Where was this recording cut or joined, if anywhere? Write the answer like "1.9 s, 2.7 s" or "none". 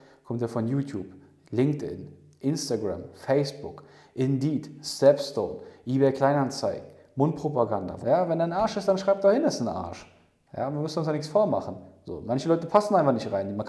8.0 s